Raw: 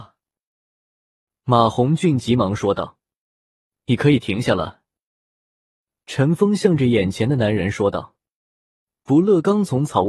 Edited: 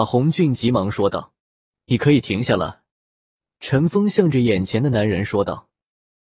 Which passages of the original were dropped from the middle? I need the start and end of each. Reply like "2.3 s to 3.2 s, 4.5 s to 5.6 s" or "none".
3.0 s to 3.4 s, 4.9 s to 5.3 s